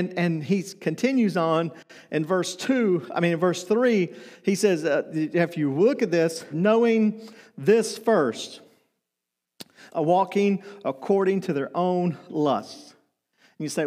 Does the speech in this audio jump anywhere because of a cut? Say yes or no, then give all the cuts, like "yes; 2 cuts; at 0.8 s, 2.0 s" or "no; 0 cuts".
yes; 2 cuts; at 6.5 s, 9.9 s